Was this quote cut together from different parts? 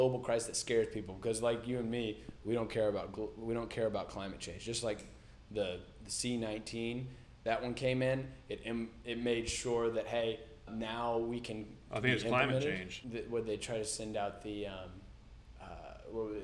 yes; 3 cuts; at 10.7 s, 11.9 s, 13.0 s

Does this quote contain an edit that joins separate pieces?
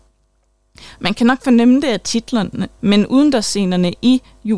yes; 1 cut; at 2.8 s

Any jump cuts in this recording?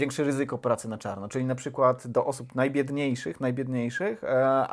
no; 0 cuts

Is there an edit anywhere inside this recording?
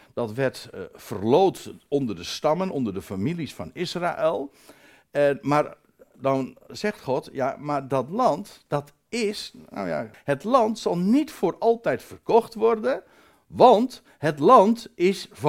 yes; 1 cut; at 10.1 s

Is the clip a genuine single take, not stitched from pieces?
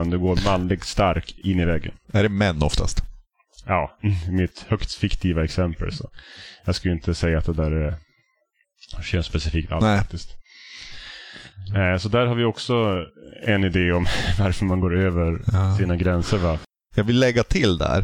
yes; 0 cuts

